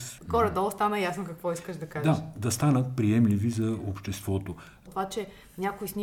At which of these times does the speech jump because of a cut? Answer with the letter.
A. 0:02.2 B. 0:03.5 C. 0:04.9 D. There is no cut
C